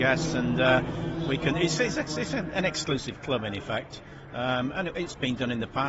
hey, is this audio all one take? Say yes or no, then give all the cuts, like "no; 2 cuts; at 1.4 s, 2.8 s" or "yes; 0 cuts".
yes; 0 cuts